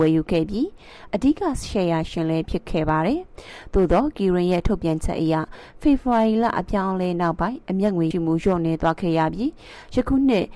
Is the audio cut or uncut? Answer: cut